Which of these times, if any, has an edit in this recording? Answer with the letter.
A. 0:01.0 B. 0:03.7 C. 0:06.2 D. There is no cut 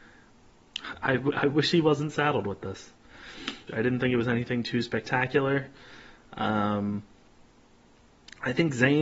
B